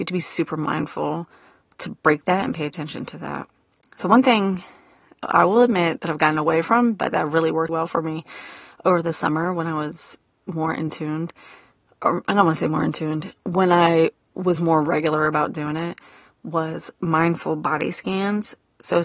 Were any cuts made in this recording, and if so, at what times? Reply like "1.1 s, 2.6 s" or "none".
7.7 s